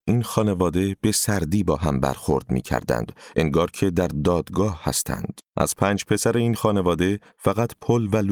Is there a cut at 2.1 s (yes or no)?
no